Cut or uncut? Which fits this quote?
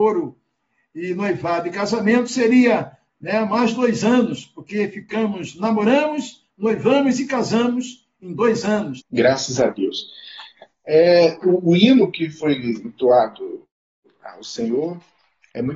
cut